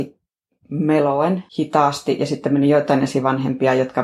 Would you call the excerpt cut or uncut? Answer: cut